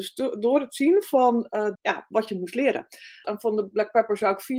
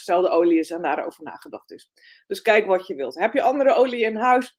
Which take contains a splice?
first; 2 cuts; at 1.7 s, 3.2 s

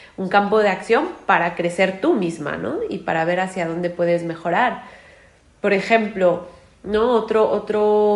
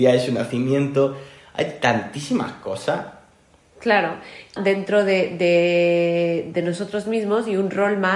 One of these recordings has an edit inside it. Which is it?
second; 2 cuts; at 4.6 s, 6.5 s

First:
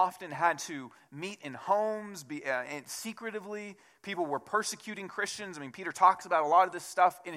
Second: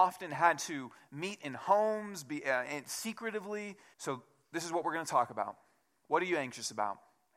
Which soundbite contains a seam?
second; 1 cut; at 3.9 s

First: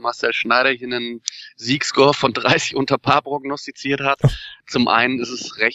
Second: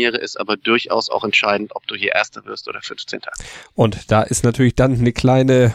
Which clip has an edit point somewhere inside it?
first; 1 cut; at 4.6 s

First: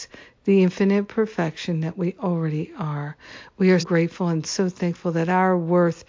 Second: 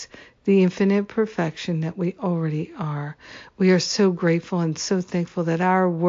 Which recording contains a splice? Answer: first; 1 cut; at 3.8 s

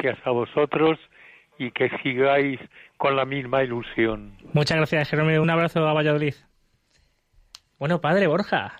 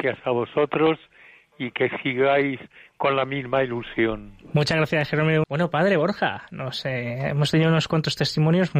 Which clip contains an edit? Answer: second; 1 cut; at 5.4 s

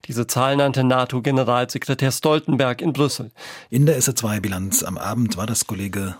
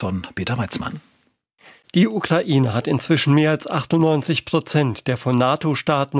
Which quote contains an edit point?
first; 1 cut; at 3.7 s

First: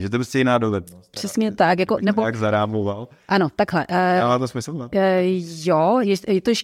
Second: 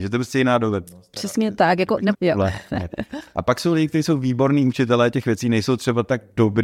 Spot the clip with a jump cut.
second; 1 cut; at 2.1 s

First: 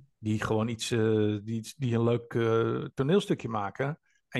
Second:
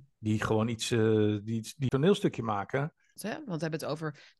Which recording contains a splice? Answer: second; 2 cuts; at 1.9 s, 3.2 s

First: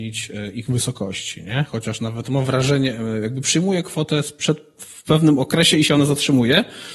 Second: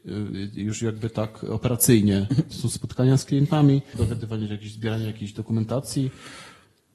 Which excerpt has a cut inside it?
second; 2 cuts; at 2.5 s, 3.9 s

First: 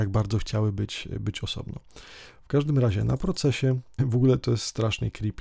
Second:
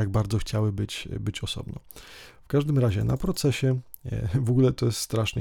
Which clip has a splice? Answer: first; 1 cut; at 4.0 s

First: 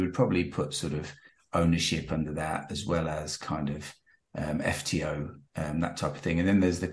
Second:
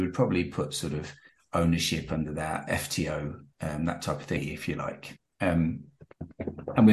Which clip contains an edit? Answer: second; 2 cuts; at 2.7 s, 4.4 s

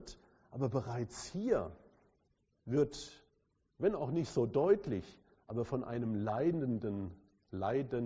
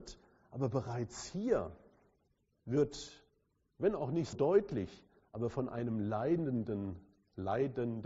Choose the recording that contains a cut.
second; 1 cut; at 4.3 s

